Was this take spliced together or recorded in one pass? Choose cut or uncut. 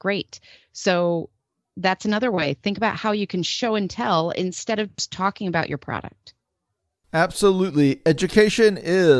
uncut